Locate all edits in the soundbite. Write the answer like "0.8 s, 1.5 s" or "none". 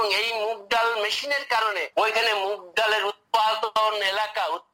1.9 s